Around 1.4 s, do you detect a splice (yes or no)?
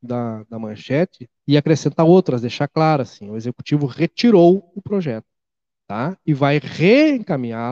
yes